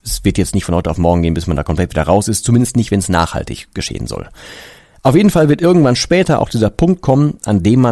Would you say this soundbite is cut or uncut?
uncut